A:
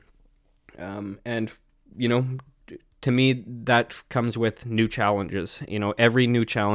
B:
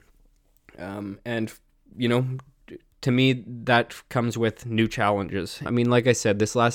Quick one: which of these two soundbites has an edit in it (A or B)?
B